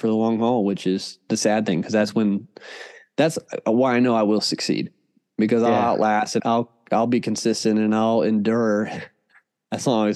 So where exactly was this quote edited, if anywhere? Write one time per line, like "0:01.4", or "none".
0:06.4